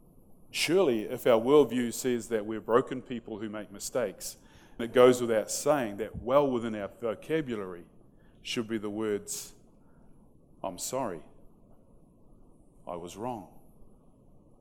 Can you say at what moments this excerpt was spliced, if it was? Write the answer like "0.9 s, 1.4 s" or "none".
4.8 s